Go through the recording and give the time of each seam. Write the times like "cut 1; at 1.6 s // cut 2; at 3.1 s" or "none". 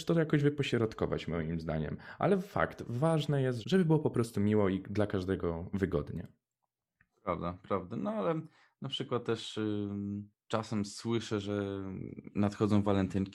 cut 1; at 3.6 s